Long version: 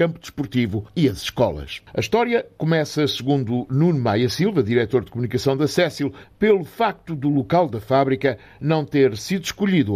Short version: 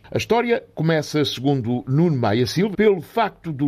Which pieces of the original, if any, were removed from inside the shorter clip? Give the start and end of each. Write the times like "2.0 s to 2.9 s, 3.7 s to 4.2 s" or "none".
4.5 s to 6.3 s